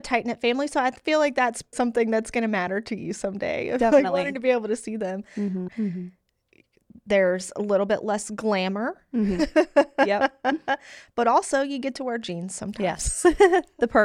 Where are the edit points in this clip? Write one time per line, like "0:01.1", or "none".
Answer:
0:01.7
0:05.7